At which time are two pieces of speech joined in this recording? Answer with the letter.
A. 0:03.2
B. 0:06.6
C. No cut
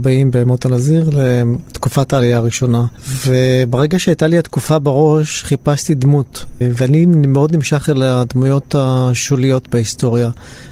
C